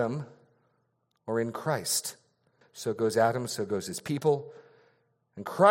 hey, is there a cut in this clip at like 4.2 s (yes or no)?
no